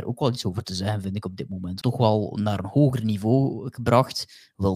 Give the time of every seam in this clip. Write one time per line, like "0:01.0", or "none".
0:01.8